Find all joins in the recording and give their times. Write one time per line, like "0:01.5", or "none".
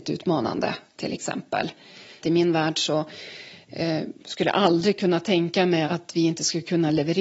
0:02.2
0:05.8